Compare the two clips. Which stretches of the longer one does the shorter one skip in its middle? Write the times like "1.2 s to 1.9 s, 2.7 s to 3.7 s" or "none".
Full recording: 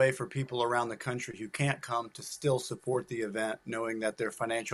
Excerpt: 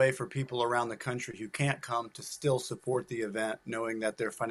none

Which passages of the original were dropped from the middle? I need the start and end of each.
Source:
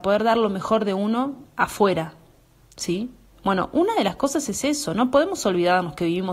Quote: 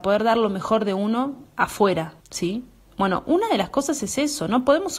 2.2 s to 2.7 s

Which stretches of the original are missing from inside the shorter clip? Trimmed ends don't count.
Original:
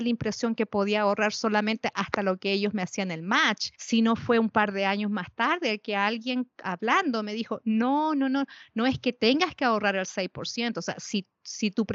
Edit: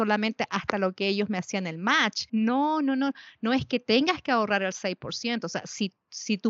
3.7 s to 7.6 s

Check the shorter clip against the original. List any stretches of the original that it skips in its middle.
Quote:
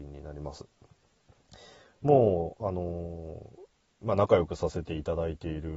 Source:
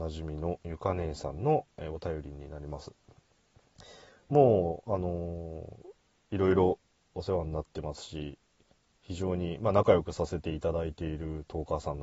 6.3 s to 9.6 s

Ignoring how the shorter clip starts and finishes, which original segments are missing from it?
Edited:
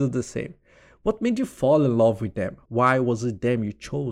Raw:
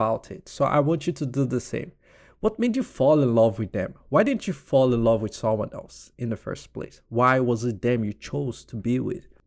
4.0 s to 7.1 s

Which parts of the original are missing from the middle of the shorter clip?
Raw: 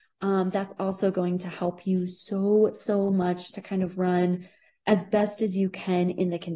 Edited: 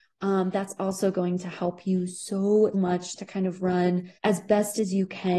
2.7 s to 3.1 s, 4.5 s to 4.8 s

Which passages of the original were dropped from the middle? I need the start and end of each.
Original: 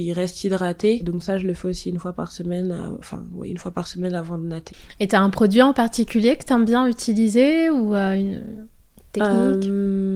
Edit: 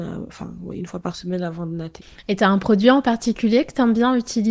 none

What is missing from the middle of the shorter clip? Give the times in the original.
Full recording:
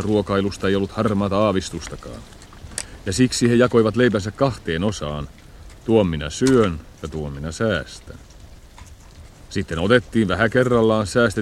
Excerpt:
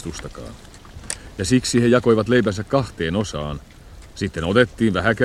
5.8 s to 9.5 s

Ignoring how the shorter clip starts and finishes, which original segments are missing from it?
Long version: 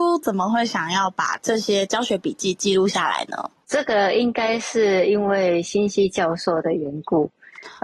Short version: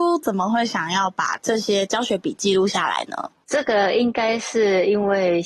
2.3 s to 2.5 s

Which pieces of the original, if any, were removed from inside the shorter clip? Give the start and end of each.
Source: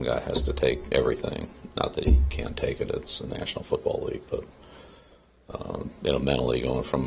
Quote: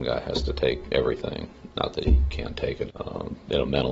2.9 s to 5.4 s

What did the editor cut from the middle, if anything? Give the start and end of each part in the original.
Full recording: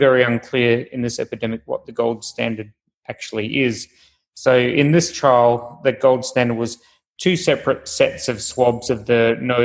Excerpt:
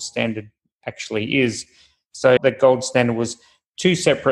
4.6 s to 5.8 s

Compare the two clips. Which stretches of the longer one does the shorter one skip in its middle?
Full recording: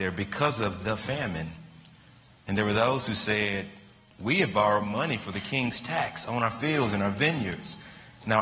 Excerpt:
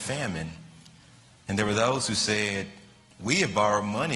none

